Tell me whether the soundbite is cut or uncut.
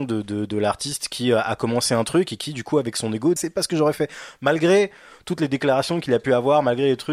cut